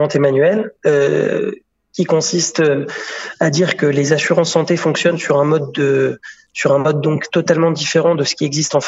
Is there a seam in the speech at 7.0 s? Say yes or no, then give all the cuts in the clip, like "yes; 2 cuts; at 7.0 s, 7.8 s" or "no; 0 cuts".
no; 0 cuts